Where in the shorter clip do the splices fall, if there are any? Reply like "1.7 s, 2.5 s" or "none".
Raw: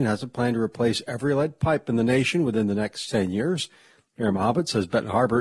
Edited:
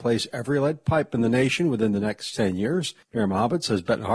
3.0 s